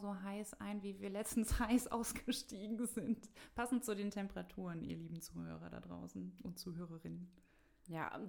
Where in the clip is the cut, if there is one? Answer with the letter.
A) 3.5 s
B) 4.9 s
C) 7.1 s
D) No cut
D